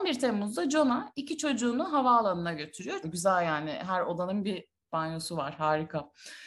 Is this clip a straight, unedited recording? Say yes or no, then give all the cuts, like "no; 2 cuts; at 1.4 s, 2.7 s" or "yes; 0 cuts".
no; 1 cut; at 3.0 s